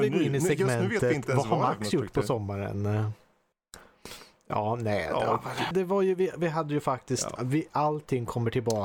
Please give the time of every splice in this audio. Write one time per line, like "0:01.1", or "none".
0:05.7
0:07.4